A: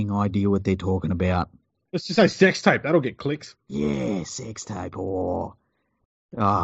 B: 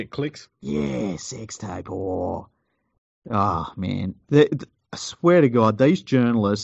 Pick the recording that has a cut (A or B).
A